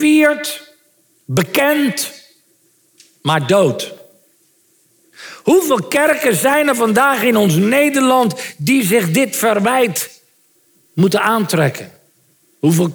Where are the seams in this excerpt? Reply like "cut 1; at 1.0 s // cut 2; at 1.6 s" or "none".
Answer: none